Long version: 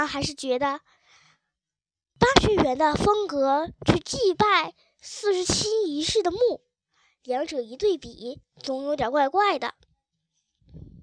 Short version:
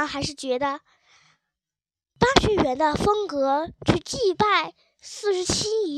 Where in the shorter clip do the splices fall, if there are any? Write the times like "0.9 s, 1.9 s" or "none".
none

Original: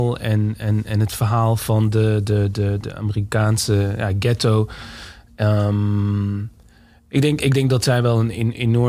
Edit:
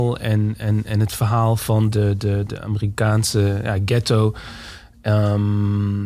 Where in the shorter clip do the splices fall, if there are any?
1.9 s

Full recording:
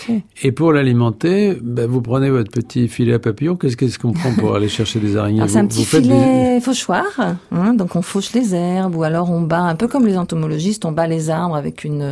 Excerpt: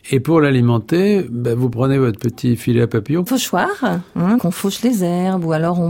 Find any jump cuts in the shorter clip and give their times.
3.3 s, 4.4 s

